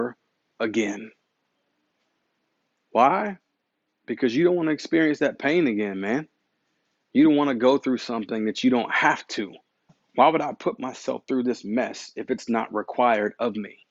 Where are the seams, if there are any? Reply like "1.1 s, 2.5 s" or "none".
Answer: none